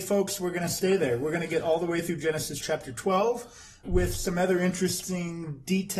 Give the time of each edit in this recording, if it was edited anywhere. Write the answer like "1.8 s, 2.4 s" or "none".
3.8 s